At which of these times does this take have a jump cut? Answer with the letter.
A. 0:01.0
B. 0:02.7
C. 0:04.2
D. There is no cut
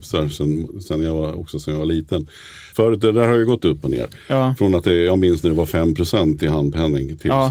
B